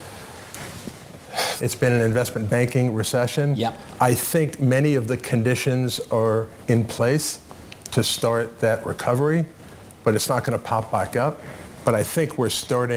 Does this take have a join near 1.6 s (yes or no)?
yes